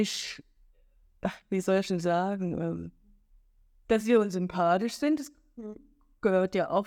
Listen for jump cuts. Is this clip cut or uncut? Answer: uncut